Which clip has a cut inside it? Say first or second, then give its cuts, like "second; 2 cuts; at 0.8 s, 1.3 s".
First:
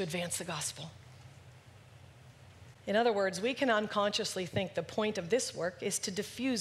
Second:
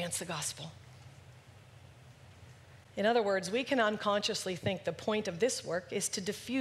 first; 1 cut; at 2.7 s